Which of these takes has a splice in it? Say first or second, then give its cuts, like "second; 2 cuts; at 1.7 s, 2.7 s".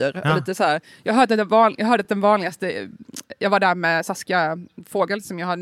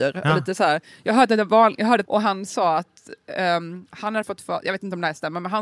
second; 1 cut; at 2.0 s